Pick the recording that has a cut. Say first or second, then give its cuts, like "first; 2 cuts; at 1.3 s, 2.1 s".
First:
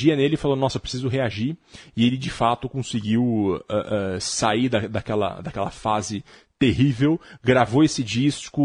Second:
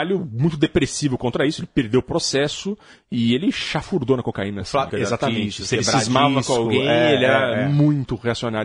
second; 1 cut; at 4.9 s